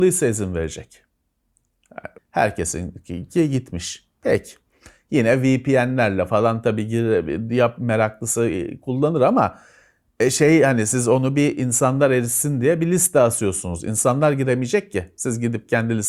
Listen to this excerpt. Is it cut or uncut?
cut